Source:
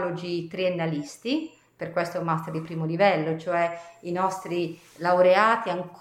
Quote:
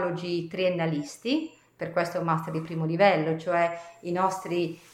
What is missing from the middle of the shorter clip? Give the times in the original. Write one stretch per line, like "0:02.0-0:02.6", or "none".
none